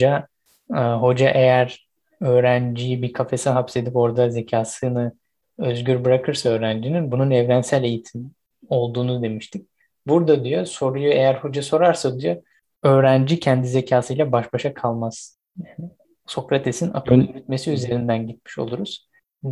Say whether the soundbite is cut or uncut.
uncut